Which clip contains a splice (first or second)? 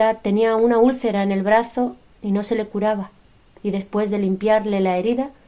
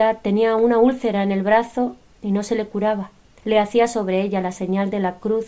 second